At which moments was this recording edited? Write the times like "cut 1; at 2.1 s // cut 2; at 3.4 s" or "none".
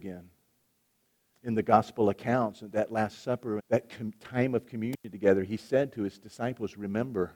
cut 1; at 1.3 s // cut 2; at 3.6 s